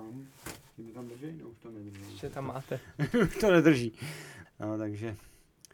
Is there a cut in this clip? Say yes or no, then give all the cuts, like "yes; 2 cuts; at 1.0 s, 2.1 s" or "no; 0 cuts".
yes; 1 cut; at 4.4 s